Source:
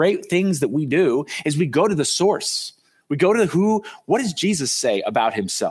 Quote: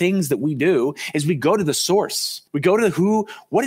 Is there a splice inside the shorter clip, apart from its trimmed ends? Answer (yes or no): yes